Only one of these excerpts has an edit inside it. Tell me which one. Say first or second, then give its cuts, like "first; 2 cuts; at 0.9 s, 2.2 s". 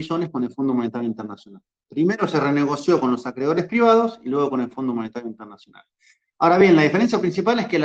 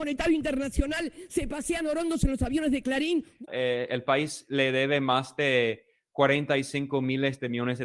second; 1 cut; at 3.5 s